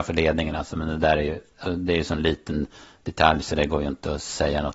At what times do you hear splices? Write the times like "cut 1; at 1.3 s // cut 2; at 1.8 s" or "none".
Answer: cut 1; at 1.6 s